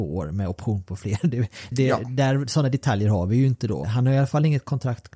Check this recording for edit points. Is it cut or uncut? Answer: cut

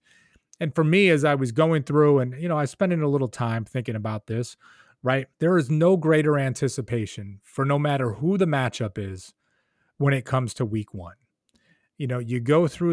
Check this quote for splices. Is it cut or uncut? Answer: cut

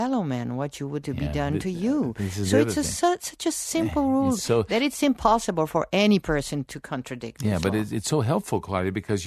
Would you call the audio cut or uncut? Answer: cut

